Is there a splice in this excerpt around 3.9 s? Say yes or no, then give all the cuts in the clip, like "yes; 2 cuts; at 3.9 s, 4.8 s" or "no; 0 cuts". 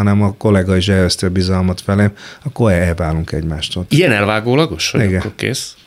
yes; 1 cut; at 3.9 s